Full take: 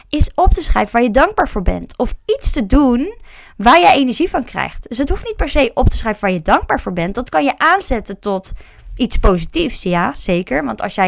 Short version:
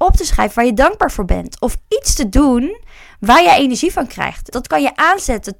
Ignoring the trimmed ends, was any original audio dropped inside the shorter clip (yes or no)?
yes